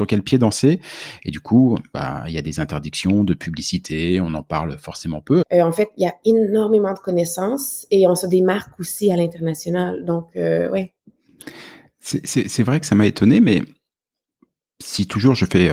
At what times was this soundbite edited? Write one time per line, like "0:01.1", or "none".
0:05.4